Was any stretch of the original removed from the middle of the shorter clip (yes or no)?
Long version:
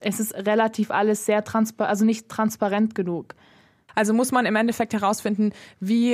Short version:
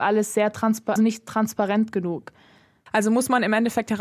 yes